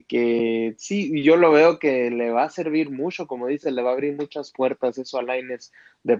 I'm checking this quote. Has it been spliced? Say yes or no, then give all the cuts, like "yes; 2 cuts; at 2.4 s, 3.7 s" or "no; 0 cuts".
no; 0 cuts